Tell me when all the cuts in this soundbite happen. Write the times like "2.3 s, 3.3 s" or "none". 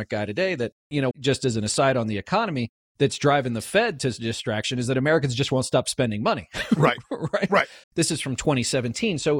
1.1 s, 7.8 s